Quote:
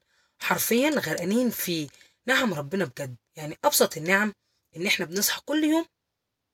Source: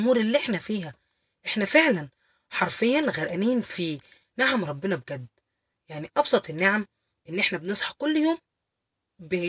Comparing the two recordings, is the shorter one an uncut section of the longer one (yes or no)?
no